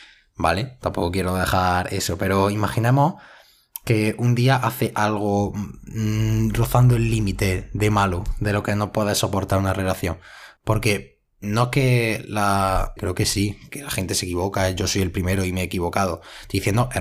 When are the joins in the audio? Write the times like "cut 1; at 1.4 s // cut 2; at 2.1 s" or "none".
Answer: cut 1; at 10.6 s // cut 2; at 13.0 s